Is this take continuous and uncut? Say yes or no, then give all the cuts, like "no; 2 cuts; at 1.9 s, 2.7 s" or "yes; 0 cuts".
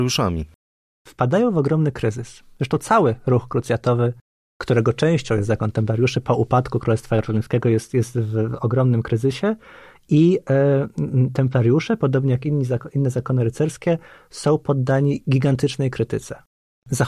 yes; 0 cuts